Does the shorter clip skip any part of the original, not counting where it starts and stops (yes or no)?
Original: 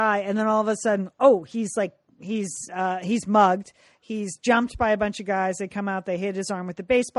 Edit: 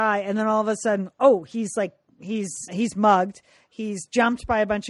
yes